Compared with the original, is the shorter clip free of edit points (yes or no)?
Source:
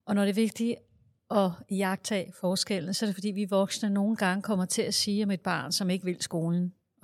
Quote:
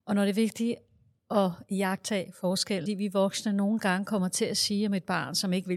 no